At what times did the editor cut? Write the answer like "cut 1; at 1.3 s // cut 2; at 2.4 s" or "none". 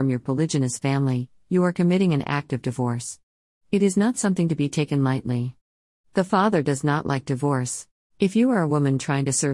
cut 1; at 6.0 s // cut 2; at 8.1 s